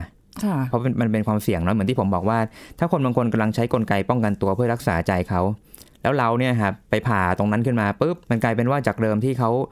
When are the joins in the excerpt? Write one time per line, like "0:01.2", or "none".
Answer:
0:08.2